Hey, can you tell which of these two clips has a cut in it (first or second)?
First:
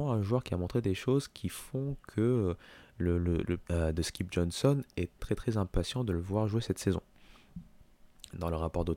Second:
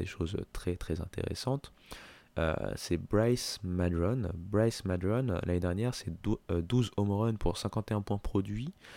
first